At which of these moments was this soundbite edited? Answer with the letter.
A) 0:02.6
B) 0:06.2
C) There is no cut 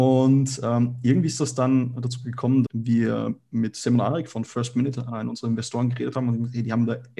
A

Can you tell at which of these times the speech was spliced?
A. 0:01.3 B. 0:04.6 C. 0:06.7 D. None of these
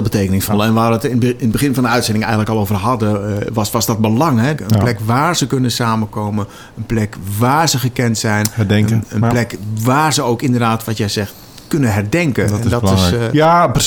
B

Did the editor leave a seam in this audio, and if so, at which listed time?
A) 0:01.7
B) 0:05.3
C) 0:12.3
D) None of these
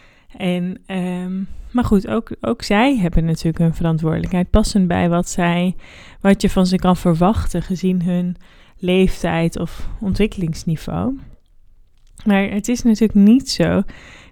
D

